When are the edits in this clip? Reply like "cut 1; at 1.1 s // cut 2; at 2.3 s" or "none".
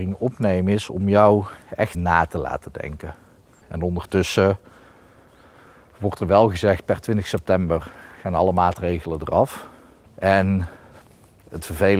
cut 1; at 1.9 s // cut 2; at 3.6 s // cut 3; at 10.1 s